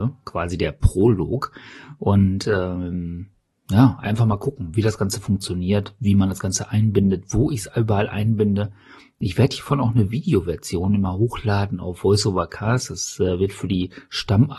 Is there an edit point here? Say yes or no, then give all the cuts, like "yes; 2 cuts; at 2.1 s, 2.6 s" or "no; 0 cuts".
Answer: no; 0 cuts